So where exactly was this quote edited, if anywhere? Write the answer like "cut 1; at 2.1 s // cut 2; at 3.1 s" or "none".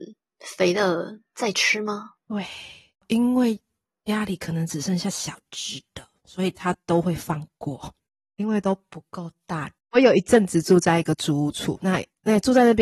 cut 1; at 9.8 s

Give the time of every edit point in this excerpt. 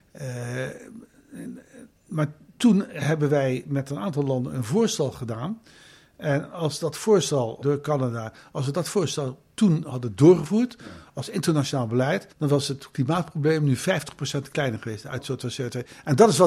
cut 1; at 7.6 s // cut 2; at 12.3 s

